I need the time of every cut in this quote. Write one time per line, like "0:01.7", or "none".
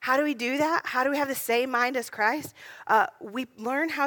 none